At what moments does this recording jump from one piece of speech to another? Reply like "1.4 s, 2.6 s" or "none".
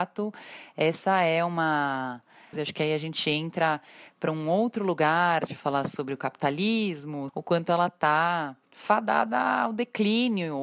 2.5 s, 7.3 s, 8.6 s